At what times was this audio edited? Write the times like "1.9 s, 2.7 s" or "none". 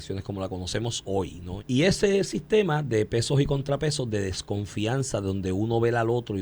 1.6 s

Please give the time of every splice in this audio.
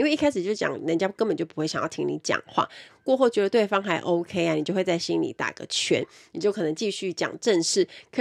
2.9 s

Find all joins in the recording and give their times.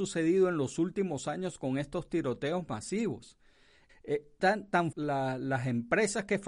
3.9 s, 4.9 s

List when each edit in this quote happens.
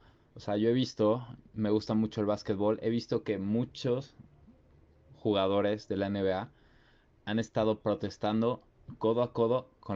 none

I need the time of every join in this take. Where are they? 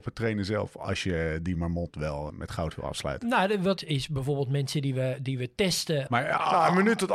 2.3 s, 3.8 s, 6.1 s

